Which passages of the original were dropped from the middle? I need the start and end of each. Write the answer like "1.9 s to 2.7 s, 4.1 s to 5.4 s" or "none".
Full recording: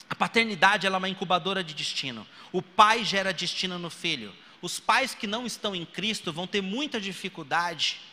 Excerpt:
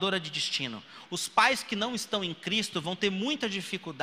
2.5 s to 4.6 s